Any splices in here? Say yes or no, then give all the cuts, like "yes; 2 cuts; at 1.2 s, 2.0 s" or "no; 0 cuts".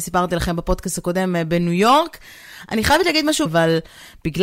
yes; 1 cut; at 3.5 s